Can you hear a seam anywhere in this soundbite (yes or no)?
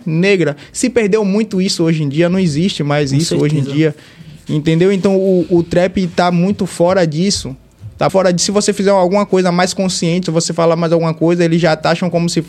yes